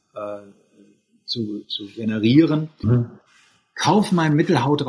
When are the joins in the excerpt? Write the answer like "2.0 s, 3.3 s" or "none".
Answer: 1.6 s, 2.8 s